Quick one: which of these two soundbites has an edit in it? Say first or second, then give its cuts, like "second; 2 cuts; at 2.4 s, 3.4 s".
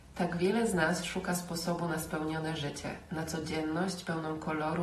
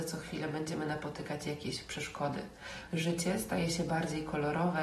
second; 1 cut; at 2.9 s